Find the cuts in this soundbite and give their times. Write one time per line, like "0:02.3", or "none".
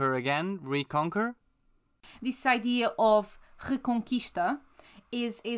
none